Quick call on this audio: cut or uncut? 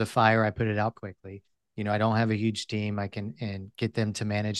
cut